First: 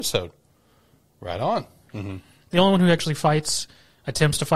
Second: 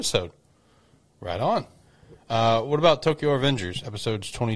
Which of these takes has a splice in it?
first; 1 cut; at 1.9 s

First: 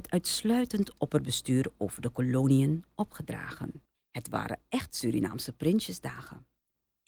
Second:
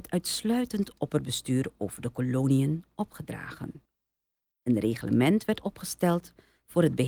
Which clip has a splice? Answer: first; 1 cut; at 3.9 s

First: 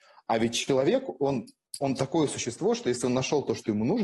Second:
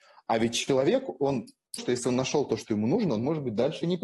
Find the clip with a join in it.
second; 1 cut; at 1.8 s

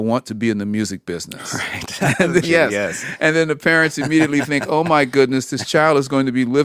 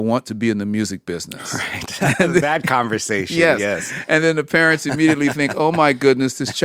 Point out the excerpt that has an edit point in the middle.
first; 1 cut; at 2.4 s

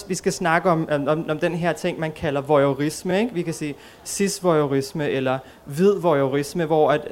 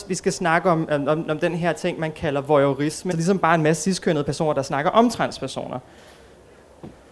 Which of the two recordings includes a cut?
second; 1 cut; at 3.1 s

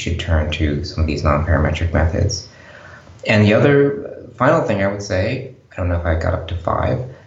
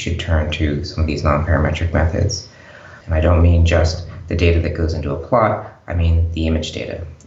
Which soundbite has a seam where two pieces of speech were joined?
second; 1 cut; at 3.0 s

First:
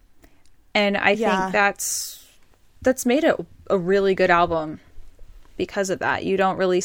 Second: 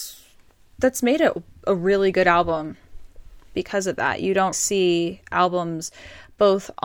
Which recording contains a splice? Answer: second; 1 cut; at 4.5 s

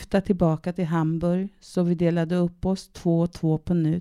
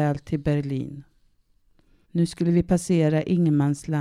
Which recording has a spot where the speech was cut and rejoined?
second; 1 cut; at 2.0 s

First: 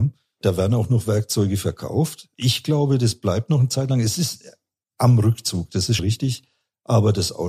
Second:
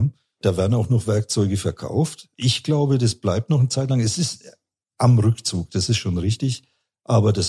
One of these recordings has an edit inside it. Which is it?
first; 1 cut; at 6.0 s

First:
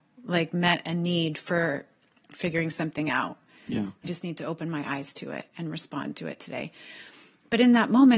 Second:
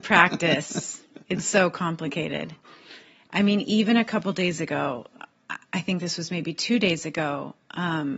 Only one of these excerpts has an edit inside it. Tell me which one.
first; 1 cut; at 4.0 s

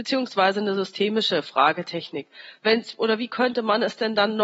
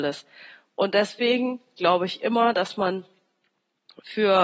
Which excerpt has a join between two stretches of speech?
first; 1 cut; at 2.6 s

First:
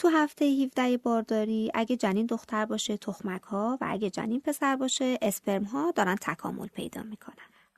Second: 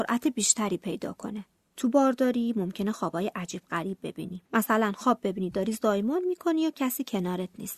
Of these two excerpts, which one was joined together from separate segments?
second; 1 cut; at 4.5 s

